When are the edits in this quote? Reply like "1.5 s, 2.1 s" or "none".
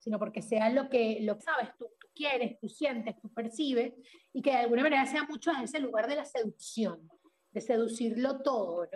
1.4 s